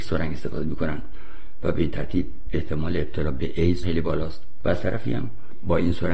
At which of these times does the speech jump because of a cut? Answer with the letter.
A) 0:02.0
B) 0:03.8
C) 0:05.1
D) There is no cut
B